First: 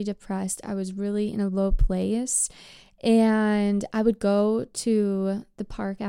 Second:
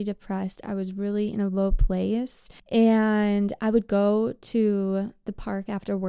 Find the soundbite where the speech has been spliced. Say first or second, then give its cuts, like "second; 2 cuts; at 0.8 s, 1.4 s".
second; 1 cut; at 2.6 s